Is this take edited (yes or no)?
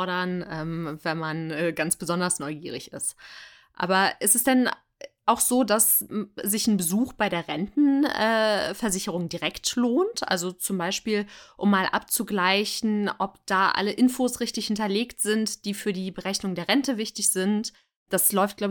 no